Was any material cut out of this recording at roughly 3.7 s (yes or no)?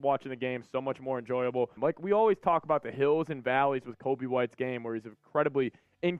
no